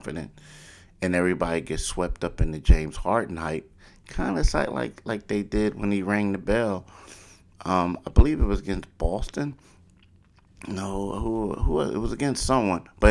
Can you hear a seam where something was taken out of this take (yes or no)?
no